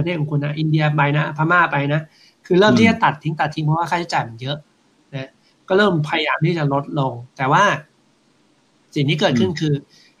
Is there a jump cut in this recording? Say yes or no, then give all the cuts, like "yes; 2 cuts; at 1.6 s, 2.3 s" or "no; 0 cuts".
no; 0 cuts